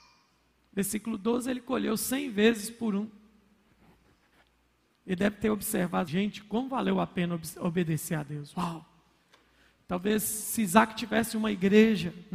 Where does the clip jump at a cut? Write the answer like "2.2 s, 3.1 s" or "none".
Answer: 6.1 s